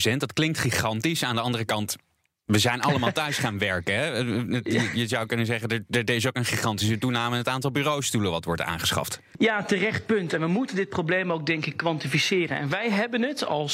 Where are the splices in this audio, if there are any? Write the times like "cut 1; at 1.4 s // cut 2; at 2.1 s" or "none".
none